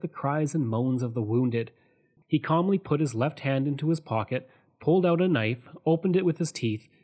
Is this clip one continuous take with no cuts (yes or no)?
no